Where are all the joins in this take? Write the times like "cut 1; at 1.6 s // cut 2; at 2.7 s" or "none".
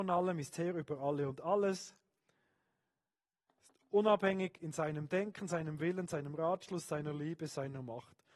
none